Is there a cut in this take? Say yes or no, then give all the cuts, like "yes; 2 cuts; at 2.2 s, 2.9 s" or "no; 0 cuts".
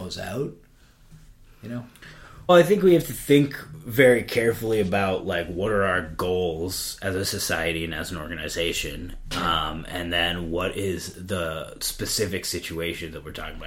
yes; 1 cut; at 2.5 s